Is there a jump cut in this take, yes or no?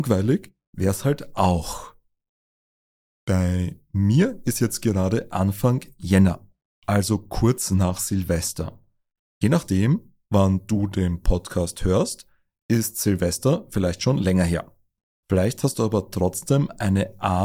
no